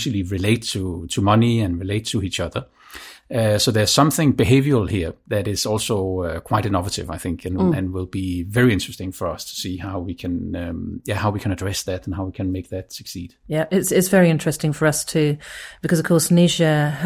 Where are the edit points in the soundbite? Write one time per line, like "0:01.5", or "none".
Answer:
none